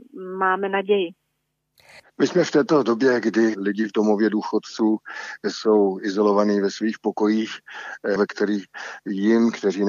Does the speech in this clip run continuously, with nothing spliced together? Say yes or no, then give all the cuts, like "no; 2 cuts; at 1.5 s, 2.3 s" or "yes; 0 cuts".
no; 2 cuts; at 2.0 s, 8.2 s